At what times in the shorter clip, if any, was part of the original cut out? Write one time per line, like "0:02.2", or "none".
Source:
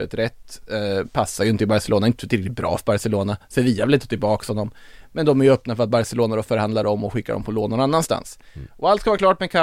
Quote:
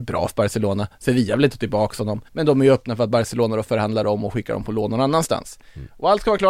0:02.3